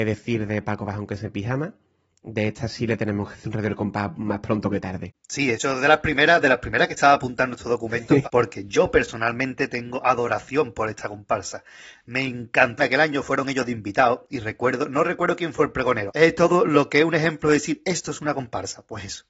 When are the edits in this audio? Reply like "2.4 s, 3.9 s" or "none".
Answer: 8.2 s, 12.8 s, 16.1 s